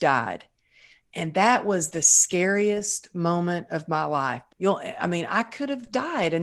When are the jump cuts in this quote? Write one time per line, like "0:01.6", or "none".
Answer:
0:04.5